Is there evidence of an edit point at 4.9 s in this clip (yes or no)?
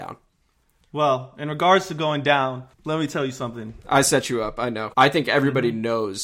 yes